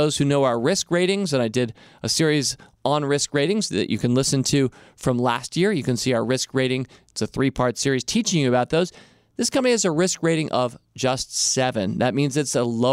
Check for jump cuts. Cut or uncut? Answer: uncut